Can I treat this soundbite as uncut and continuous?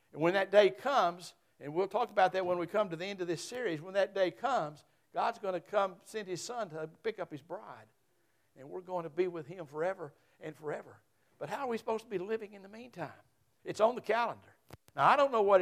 no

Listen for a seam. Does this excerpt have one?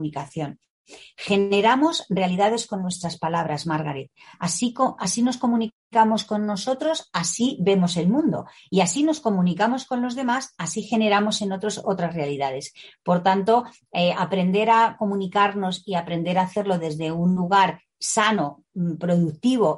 no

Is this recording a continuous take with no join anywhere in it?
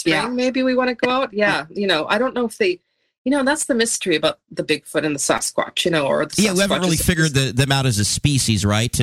yes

